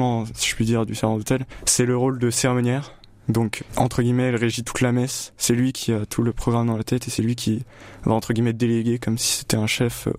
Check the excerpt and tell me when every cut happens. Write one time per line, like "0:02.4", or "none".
0:03.6